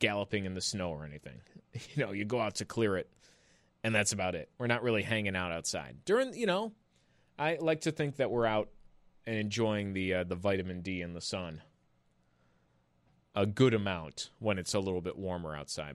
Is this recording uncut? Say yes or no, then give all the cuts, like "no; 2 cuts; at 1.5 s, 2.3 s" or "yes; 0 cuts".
yes; 0 cuts